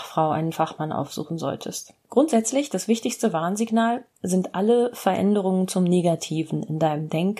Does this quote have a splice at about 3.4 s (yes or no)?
no